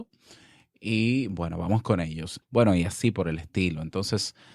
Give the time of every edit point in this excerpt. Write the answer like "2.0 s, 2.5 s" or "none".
2.4 s